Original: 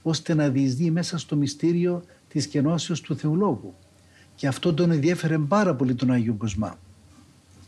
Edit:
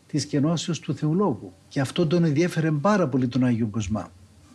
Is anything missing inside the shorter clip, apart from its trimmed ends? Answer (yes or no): yes